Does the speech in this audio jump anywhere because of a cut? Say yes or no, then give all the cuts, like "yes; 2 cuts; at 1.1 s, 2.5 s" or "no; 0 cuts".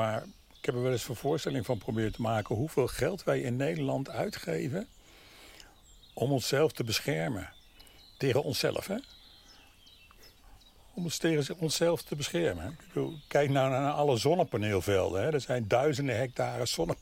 no; 0 cuts